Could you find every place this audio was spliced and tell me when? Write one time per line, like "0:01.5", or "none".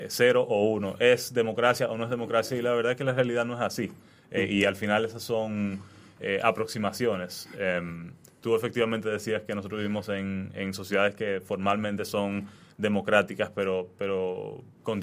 none